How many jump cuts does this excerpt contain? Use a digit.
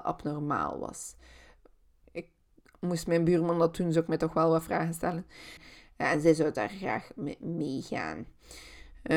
2